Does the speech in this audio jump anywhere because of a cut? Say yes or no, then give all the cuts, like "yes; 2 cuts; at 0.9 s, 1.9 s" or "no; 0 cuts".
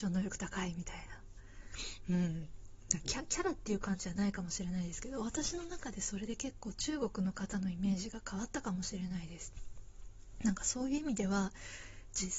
no; 0 cuts